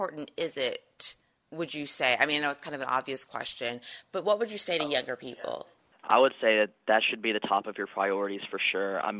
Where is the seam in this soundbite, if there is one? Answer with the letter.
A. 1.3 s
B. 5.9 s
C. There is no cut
C